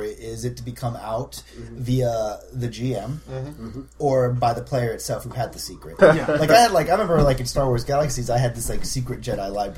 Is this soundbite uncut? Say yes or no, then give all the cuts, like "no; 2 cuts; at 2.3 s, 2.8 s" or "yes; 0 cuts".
no; 1 cut; at 6.0 s